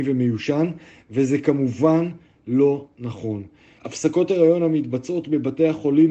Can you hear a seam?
yes; 1 cut; at 3.8 s

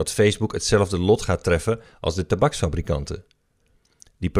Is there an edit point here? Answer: no; 0 cuts

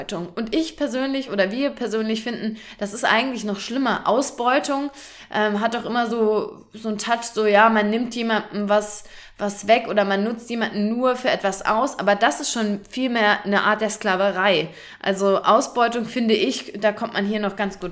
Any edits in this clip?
no; 0 cuts

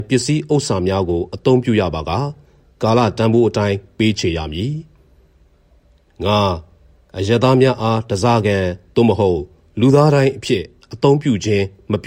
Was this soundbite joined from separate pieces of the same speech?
no; 0 cuts

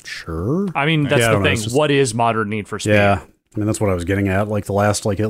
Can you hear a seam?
no; 0 cuts

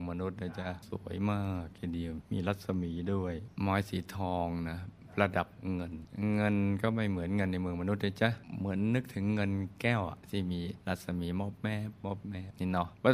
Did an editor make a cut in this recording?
yes; 1 cut; at 10.8 s

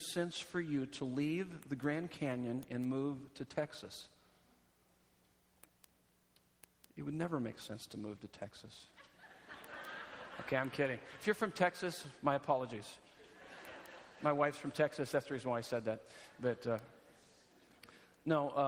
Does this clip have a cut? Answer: no; 0 cuts

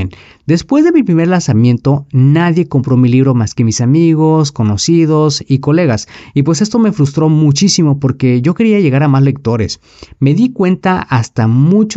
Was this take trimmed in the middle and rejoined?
no; 0 cuts

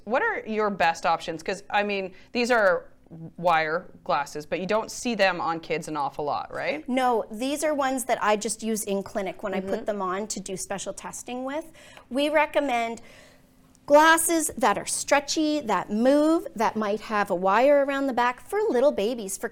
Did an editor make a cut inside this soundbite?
no; 0 cuts

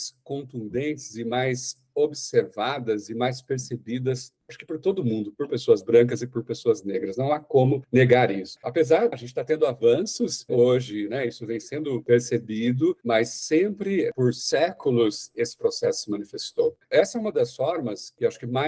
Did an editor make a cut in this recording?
yes; 2 cuts; at 9.1 s, 16.8 s

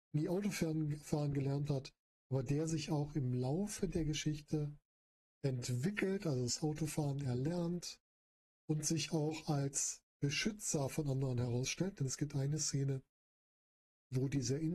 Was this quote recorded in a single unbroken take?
yes; 0 cuts

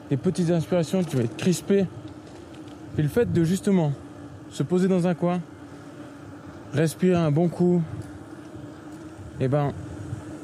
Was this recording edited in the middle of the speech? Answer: no; 0 cuts

